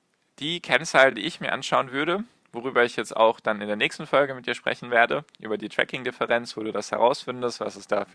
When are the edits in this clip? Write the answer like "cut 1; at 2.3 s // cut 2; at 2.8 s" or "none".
none

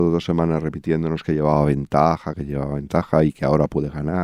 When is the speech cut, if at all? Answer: cut 1; at 2.3 s

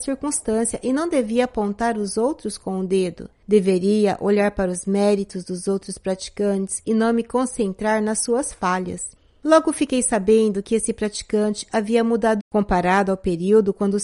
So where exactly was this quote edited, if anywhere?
cut 1; at 12.4 s

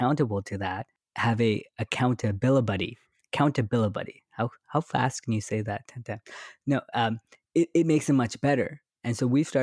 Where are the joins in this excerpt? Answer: none

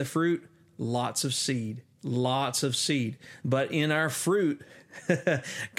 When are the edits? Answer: cut 1; at 1.9 s // cut 2; at 3.4 s

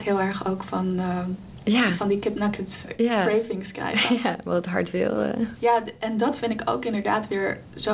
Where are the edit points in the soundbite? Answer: cut 1; at 5.6 s

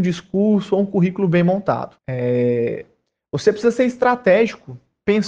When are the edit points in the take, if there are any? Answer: cut 1; at 2.0 s

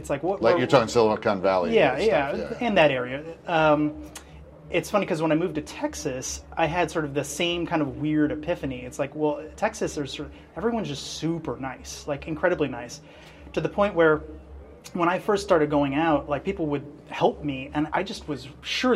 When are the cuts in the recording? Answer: cut 1; at 17.9 s

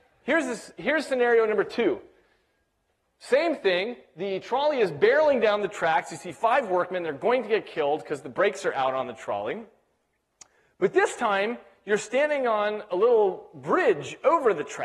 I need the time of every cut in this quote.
none

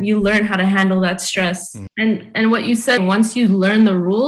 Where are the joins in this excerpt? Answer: cut 1; at 1.9 s // cut 2; at 3.0 s

